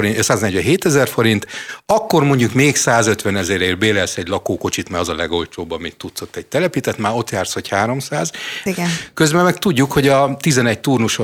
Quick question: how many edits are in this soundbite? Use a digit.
1